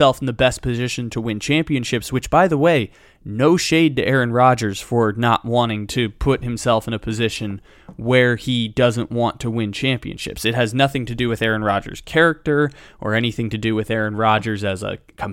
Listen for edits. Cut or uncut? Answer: uncut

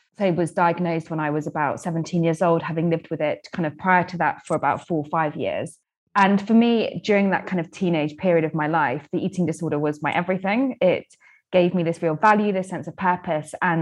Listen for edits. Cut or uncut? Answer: uncut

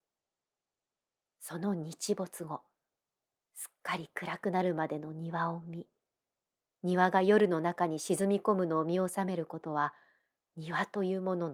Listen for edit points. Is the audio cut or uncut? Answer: uncut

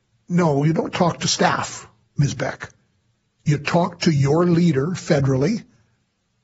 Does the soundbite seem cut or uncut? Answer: uncut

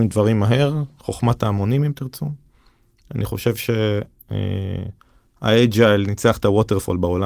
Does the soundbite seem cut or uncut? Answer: uncut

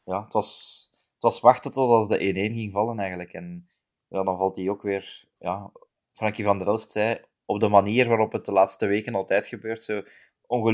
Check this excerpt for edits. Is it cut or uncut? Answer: uncut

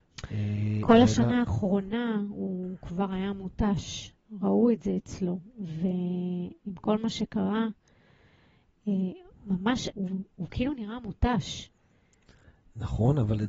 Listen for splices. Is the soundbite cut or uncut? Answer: cut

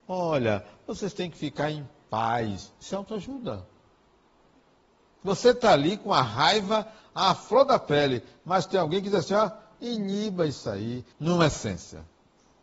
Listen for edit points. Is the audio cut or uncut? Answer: cut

